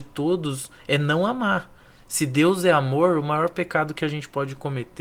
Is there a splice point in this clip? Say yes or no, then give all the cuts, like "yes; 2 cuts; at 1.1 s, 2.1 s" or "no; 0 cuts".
no; 0 cuts